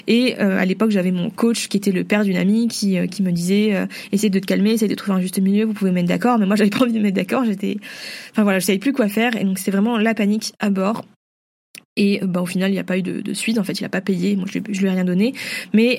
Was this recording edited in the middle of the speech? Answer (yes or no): no